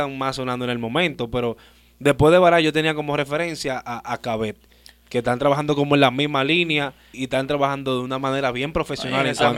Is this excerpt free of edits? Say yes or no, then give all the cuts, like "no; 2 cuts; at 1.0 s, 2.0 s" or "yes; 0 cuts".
no; 1 cut; at 7.1 s